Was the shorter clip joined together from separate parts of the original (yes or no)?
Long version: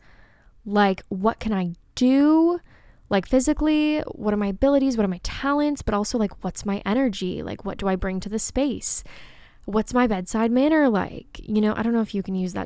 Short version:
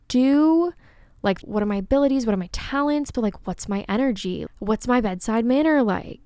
yes